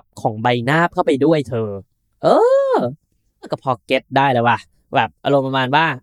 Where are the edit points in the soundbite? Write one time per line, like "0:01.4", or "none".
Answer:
none